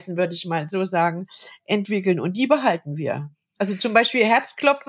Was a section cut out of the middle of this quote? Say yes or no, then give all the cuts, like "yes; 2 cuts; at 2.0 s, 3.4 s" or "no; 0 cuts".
no; 0 cuts